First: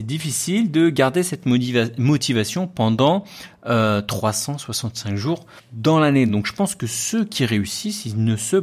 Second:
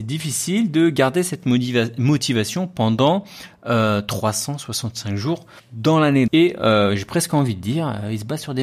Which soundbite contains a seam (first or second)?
second